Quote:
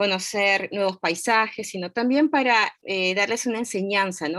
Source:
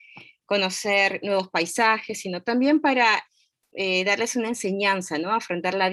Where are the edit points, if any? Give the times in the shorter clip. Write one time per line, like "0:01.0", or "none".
0:02.8